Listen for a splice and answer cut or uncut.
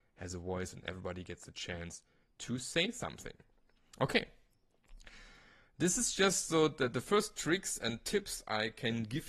uncut